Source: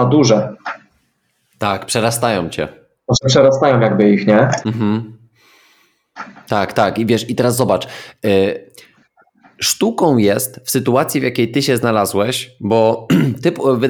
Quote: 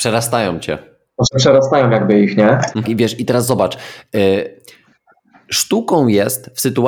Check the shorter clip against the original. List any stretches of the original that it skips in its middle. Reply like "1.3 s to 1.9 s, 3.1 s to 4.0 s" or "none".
4.7 s to 6.9 s